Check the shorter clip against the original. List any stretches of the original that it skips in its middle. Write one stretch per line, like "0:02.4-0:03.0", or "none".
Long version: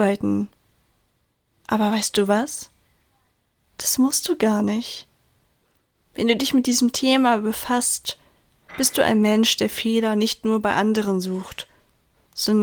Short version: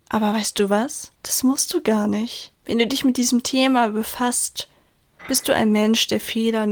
0:02.7-0:03.7
0:05.1-0:06.0